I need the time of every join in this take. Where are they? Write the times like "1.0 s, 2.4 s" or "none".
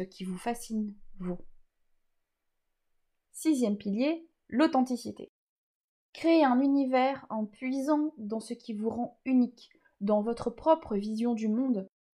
none